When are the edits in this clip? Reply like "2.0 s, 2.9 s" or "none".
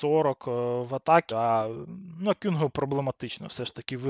1.3 s